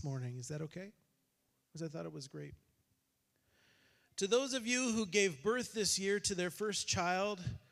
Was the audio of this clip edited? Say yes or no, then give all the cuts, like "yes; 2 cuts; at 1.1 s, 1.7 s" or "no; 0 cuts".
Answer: no; 0 cuts